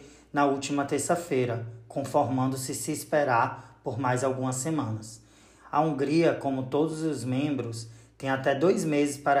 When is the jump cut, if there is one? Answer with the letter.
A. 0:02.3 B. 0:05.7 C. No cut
B